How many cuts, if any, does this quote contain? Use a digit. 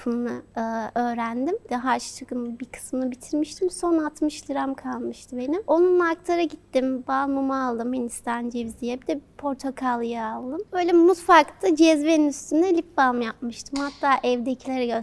1